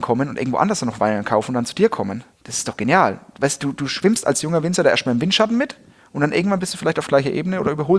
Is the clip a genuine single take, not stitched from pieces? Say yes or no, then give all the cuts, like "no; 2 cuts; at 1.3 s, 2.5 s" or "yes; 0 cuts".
yes; 0 cuts